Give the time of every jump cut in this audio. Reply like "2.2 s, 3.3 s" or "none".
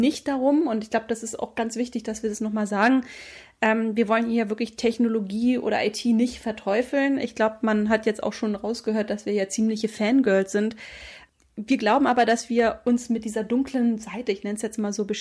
none